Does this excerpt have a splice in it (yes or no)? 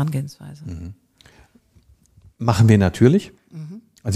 no